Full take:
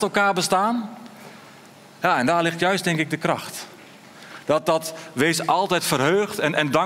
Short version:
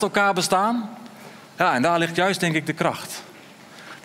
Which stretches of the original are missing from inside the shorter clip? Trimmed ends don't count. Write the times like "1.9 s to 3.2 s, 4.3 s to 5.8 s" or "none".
1.4 s to 1.9 s